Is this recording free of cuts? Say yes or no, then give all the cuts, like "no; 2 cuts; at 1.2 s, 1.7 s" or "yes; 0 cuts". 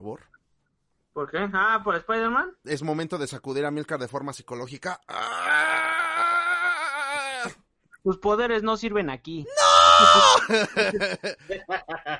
yes; 0 cuts